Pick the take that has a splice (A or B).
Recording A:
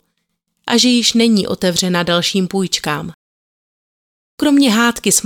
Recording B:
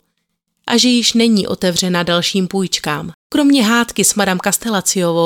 B